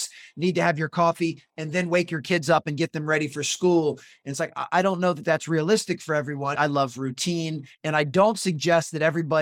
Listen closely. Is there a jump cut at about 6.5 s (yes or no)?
yes